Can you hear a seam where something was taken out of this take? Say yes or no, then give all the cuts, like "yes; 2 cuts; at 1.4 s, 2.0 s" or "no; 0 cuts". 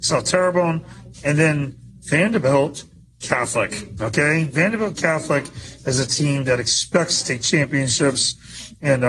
yes; 1 cut; at 1.1 s